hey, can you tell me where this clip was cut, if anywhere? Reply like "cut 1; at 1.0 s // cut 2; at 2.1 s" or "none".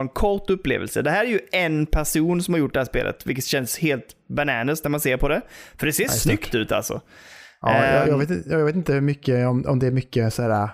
none